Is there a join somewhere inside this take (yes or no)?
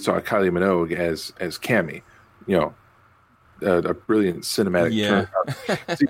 no